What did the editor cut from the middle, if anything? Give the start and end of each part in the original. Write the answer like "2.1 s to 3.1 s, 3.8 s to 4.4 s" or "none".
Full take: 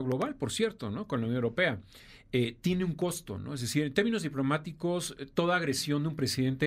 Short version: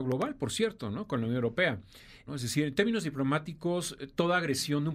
2.3 s to 3.5 s